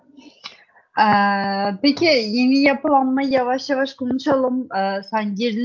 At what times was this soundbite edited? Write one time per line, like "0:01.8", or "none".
none